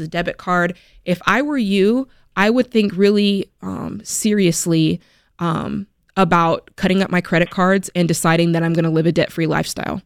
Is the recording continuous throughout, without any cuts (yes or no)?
yes